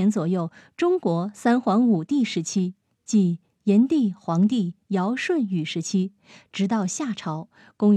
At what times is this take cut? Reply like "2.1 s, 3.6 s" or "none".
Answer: none